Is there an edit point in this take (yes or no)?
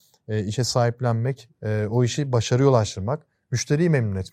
yes